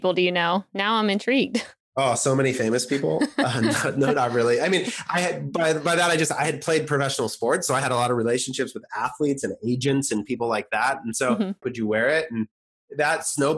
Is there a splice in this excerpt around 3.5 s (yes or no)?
no